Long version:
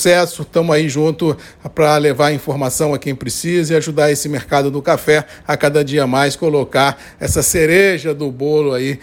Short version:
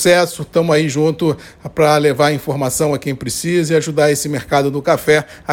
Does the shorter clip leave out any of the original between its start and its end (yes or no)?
no